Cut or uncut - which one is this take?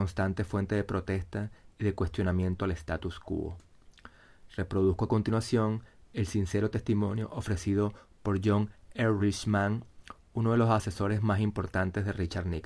uncut